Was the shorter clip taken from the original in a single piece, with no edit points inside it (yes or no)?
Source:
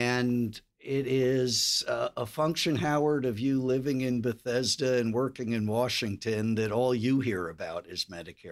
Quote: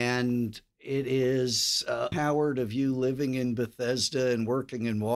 no